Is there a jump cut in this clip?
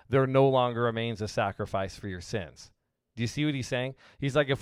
no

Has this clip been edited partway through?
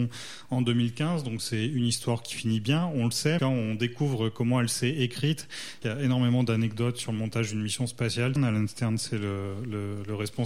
yes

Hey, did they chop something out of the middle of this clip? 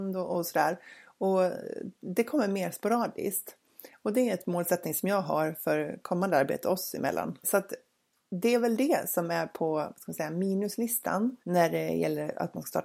yes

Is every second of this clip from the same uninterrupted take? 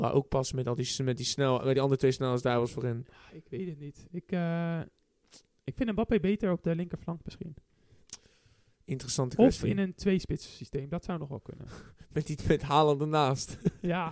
yes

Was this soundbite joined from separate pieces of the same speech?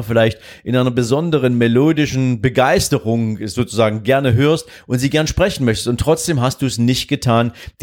no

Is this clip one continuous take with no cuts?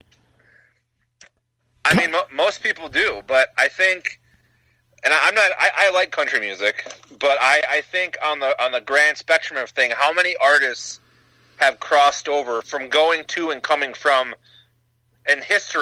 no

